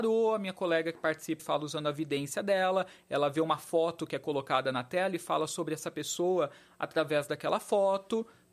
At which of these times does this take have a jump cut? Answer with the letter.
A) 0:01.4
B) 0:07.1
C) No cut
A